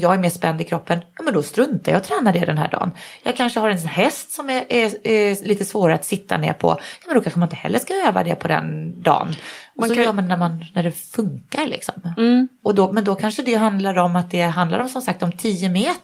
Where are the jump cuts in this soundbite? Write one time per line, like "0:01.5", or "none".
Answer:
0:12.6

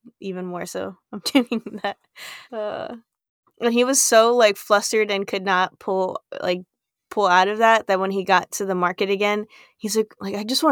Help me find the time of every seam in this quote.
0:02.4

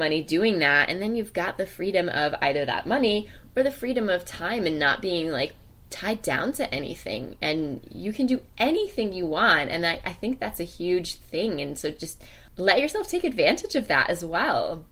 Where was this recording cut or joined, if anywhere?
none

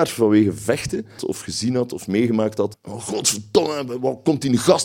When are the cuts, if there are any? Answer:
0:01.2
0:02.7

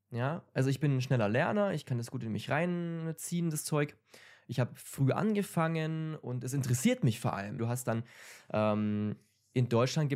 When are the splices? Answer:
0:07.6

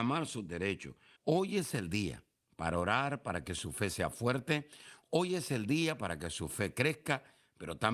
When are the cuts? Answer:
0:01.2

